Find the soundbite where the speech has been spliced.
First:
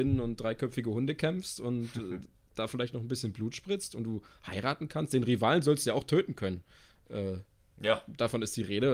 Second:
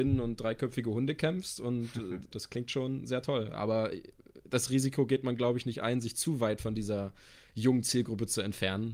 second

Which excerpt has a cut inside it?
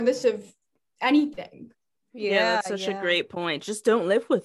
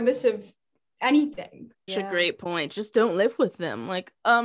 second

